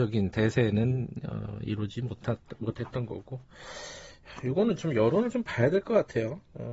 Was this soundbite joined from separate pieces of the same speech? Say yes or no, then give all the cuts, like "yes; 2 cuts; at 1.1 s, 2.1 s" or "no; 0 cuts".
no; 0 cuts